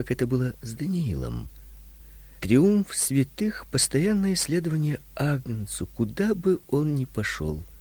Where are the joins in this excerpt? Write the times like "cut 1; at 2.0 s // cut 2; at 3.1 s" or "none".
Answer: cut 1; at 2.4 s

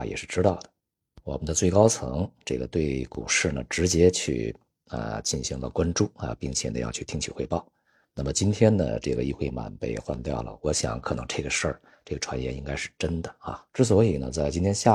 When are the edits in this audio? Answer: cut 1; at 13.7 s

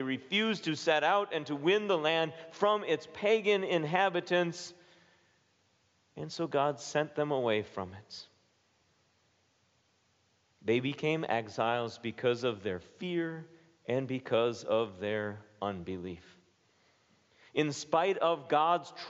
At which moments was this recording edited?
none

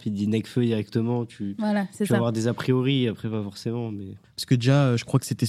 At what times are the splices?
cut 1; at 4.2 s

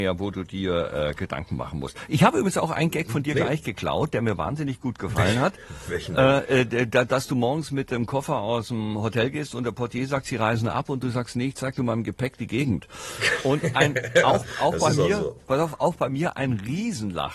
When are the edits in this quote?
none

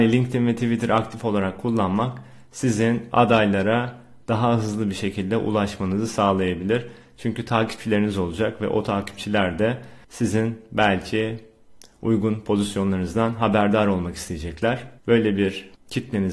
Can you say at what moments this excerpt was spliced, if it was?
cut 1; at 10.0 s

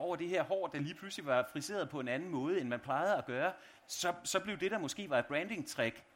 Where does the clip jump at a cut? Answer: cut 1; at 3.8 s

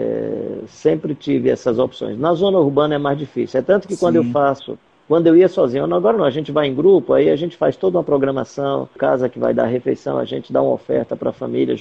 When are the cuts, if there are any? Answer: cut 1; at 9.0 s

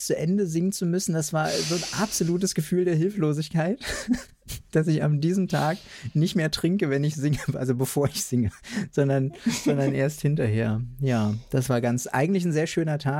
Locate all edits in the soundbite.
none

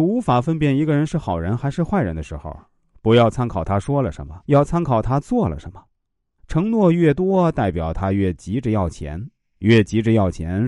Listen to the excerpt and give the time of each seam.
cut 1; at 4.4 s // cut 2; at 6.4 s

